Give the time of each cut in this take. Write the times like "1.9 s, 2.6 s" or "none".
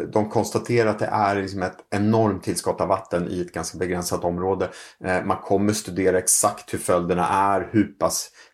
none